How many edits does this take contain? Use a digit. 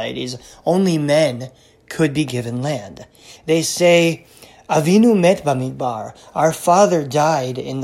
1